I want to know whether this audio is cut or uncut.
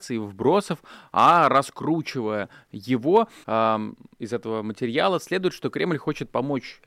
cut